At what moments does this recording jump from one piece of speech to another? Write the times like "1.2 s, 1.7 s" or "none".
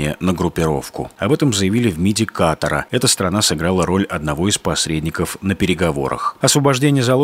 1.2 s